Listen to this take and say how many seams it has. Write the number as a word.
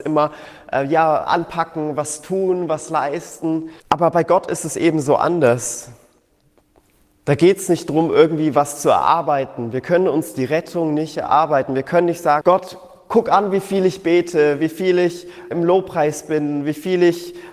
three